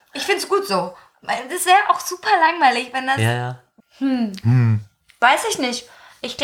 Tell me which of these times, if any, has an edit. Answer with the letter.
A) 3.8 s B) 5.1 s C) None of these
A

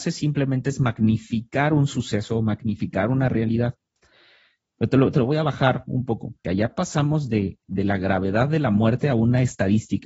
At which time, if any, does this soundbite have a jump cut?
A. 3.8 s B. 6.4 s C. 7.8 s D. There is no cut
B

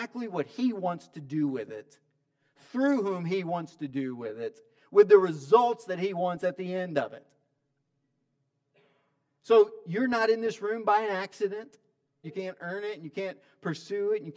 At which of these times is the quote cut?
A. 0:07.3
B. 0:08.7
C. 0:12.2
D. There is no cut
C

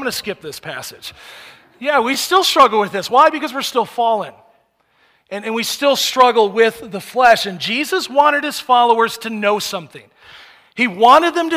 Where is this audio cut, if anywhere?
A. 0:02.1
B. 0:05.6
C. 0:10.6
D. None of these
D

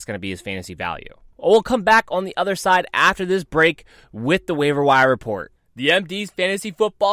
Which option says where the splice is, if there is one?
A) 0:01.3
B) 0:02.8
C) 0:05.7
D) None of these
A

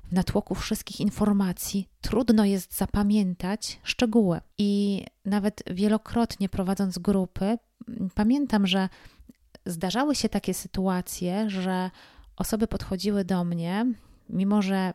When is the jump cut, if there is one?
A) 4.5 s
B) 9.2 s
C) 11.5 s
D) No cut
D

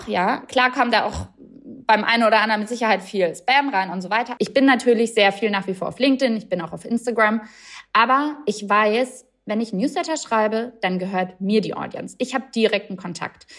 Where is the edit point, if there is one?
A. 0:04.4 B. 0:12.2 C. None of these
A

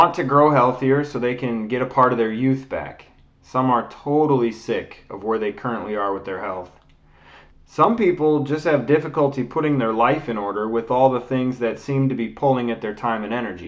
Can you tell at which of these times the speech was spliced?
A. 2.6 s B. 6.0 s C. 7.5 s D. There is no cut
C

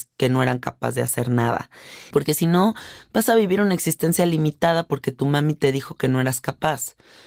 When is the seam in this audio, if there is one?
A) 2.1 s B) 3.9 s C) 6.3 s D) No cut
A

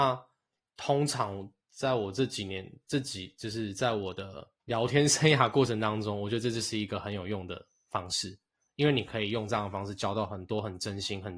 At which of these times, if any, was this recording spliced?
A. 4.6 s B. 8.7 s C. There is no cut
A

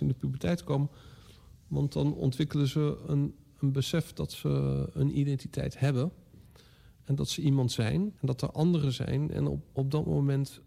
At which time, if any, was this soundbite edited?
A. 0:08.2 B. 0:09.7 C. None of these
A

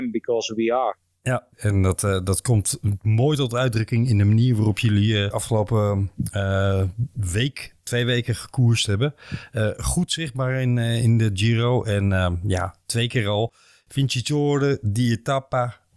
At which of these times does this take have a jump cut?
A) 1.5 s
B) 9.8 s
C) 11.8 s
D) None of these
A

